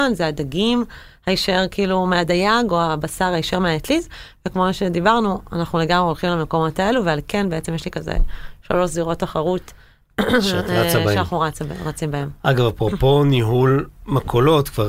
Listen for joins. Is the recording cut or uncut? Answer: uncut